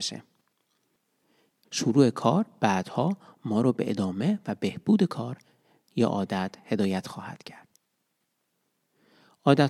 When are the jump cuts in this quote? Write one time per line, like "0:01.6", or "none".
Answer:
0:01.6